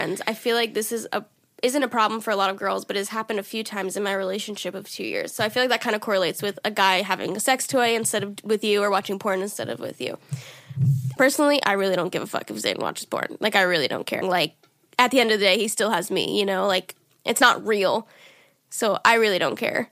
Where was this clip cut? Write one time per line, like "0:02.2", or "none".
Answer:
0:11.2
0:14.2